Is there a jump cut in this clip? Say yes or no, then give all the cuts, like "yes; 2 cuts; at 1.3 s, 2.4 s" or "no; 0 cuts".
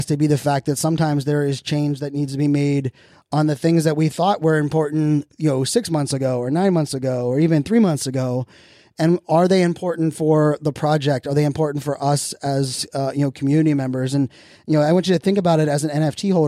no; 0 cuts